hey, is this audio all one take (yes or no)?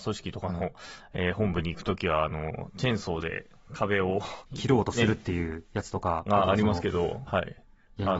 no